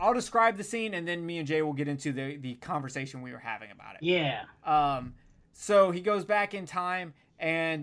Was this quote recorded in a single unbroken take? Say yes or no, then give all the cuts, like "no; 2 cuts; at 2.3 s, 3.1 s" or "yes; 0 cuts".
yes; 0 cuts